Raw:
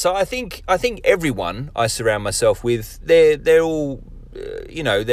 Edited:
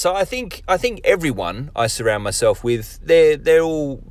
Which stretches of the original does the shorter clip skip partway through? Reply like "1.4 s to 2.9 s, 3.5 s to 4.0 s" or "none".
none

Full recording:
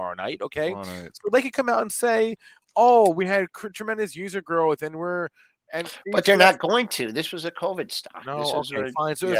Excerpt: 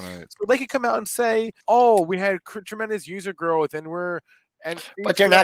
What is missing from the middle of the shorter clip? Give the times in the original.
2.4 s to 2.7 s

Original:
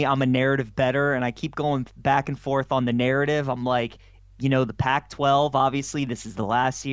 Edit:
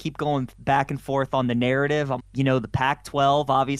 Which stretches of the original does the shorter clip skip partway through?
3.6 s to 4.2 s

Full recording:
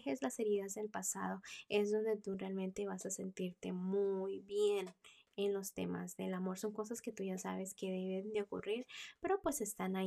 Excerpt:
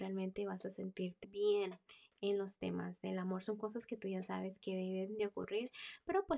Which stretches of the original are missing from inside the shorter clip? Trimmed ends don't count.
3.6 s to 4.4 s

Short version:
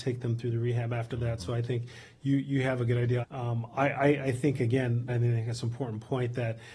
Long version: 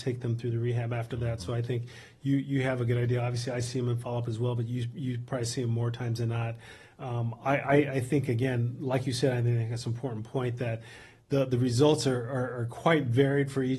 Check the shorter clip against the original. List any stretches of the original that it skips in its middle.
3.2 s to 6.9 s, 8.8 s to 9.3 s

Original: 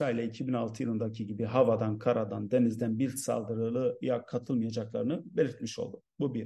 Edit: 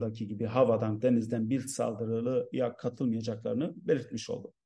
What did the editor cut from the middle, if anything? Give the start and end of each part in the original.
2.0 s to 2.5 s

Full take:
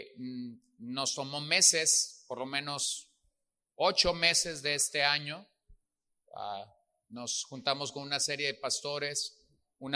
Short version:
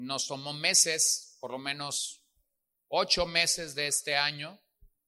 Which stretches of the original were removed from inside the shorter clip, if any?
none

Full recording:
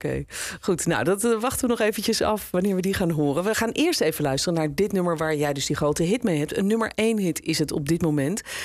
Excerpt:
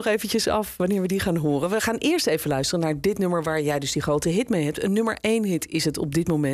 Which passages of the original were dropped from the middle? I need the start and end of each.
none

